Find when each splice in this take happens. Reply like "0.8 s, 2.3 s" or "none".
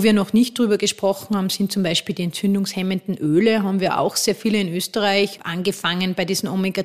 5.4 s